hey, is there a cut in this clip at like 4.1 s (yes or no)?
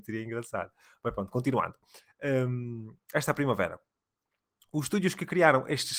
no